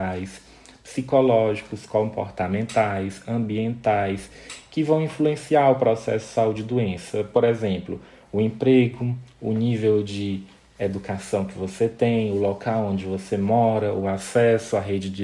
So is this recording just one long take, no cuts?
yes; 0 cuts

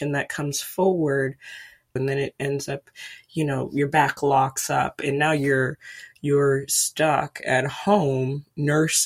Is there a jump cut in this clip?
yes; 1 cut; at 2.0 s

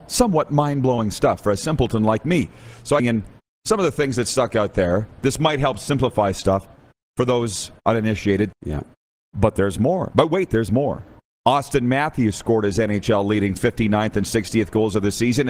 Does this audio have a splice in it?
yes; 2 cuts; at 3.0 s, 8.5 s

